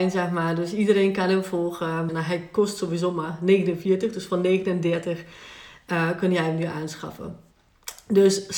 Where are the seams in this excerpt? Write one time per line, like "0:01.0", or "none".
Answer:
0:02.1

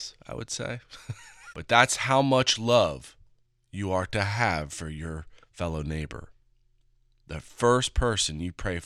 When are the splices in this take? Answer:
0:01.5
0:05.4

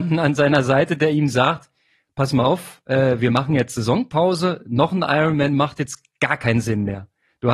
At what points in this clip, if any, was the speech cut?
none

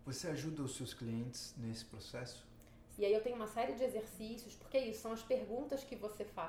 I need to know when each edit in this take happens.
0:03.0

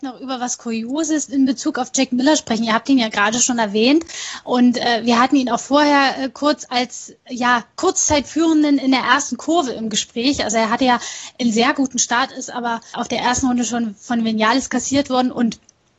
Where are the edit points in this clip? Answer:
0:12.9

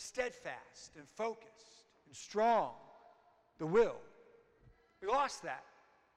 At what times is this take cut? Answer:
none

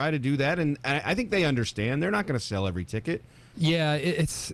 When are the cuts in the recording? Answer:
0:03.5

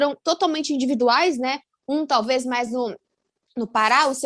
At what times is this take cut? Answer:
none

